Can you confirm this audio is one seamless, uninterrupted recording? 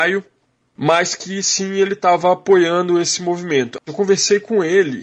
no; 1 cut; at 3.8 s

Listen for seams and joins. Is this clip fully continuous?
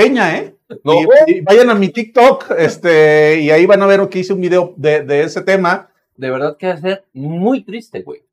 no; 1 cut; at 6.2 s

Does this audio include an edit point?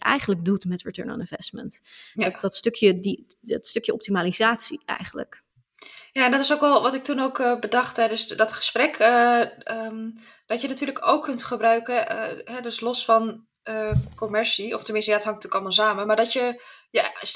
no; 0 cuts

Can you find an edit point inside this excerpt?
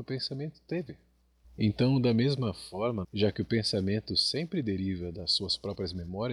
yes; 2 cuts; at 1.4 s, 3.0 s

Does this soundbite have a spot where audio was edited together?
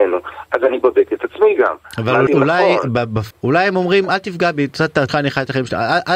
yes; 3 cuts; at 2.3 s, 3.3 s, 5.1 s

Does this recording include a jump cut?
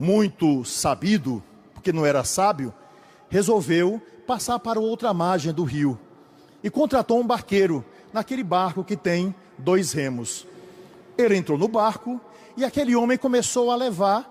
no; 0 cuts

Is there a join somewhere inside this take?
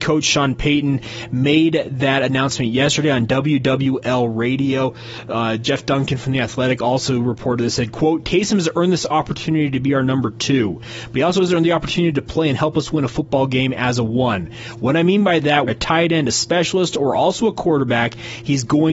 yes; 1 cut; at 15.7 s

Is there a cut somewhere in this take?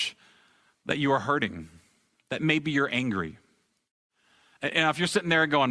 no; 0 cuts

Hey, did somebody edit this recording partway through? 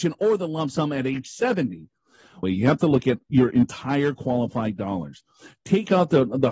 yes; 1 cut; at 2.4 s

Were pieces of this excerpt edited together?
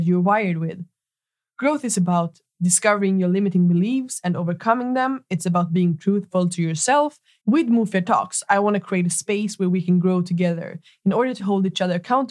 yes; 2 cuts; at 7.4 s, 11.4 s

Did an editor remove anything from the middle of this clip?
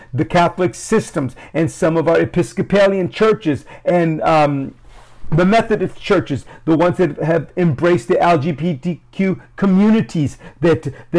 no; 0 cuts

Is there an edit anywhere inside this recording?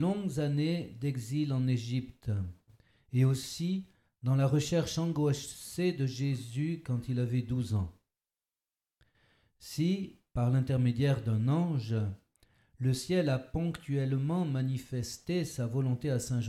no; 0 cuts

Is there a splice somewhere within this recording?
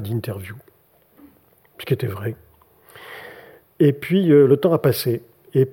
no; 0 cuts

